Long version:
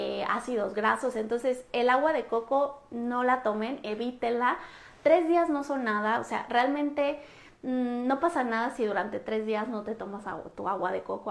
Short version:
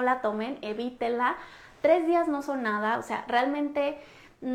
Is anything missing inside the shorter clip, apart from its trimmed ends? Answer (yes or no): no